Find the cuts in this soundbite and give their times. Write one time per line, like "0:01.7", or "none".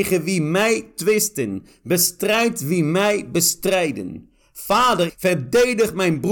0:05.1